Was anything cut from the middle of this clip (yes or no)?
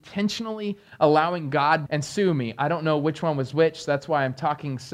yes